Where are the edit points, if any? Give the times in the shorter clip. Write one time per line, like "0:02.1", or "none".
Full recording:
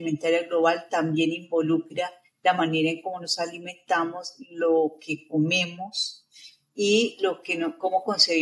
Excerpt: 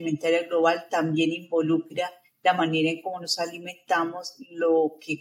none

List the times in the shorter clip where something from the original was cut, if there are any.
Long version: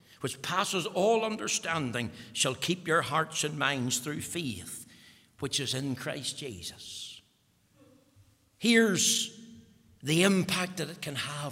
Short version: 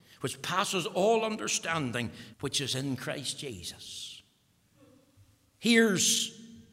0:02.3

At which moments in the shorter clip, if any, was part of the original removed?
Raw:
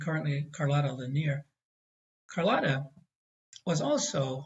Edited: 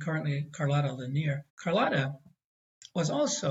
0:01.5

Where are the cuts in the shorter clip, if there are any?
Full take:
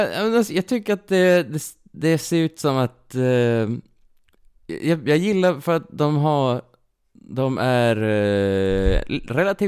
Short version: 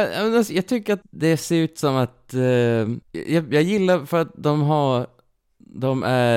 0:01.0
0:03.0

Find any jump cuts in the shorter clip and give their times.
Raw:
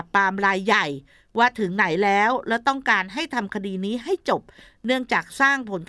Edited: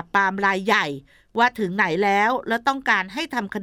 none

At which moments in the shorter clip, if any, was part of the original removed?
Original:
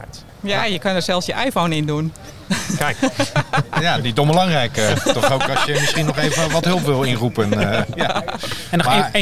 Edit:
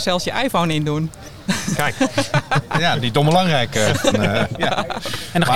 0:04.1

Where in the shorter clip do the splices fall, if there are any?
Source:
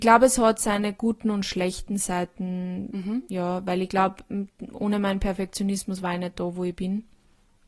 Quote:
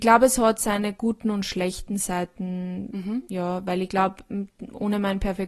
none

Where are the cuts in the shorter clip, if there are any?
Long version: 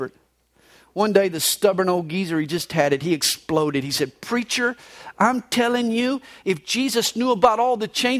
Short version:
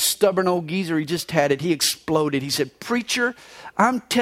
none

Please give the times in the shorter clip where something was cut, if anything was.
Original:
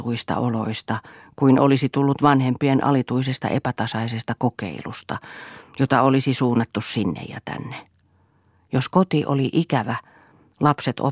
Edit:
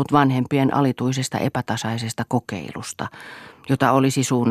none

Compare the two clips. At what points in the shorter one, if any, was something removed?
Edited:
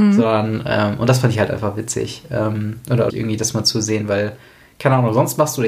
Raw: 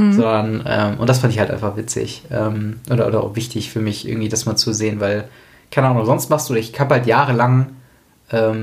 0:03.1

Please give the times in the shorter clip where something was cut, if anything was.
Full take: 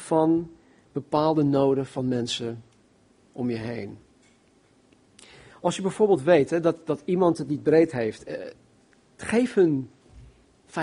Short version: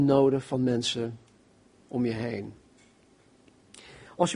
none

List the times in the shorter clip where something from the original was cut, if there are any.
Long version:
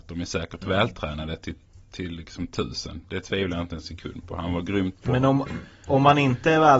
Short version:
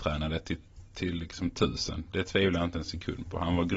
none

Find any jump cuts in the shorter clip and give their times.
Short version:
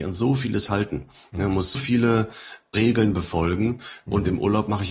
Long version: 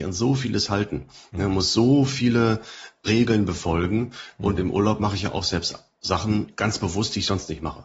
0:01.7

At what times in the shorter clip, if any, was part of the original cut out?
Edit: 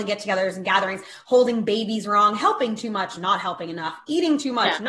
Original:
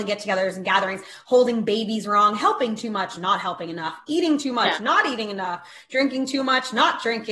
none

